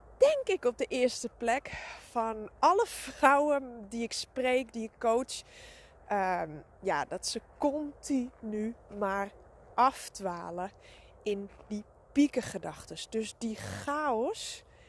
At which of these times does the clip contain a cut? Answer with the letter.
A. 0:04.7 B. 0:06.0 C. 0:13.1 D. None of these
A